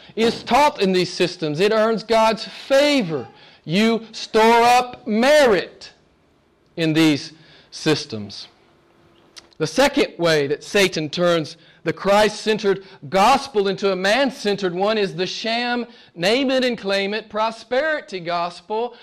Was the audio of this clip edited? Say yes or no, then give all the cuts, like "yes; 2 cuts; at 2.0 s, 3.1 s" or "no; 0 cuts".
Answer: yes; 1 cut; at 9.5 s